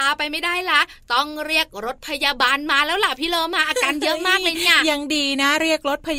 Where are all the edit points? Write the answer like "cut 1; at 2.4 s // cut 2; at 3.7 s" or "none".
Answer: none